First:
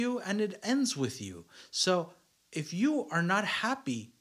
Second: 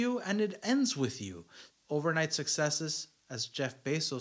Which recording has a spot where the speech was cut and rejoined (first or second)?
second